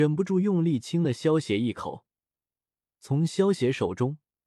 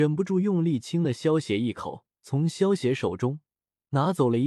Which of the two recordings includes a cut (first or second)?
second